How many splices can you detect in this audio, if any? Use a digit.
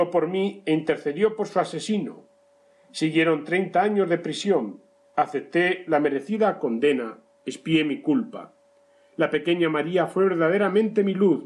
1